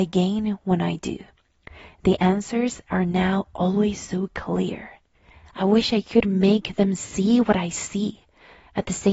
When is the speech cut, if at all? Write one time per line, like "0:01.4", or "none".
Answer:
0:05.5